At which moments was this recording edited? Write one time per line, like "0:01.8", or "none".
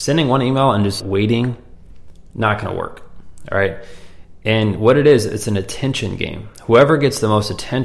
0:01.0